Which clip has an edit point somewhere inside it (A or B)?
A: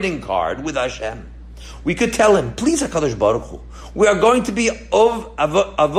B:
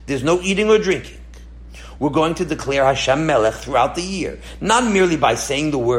B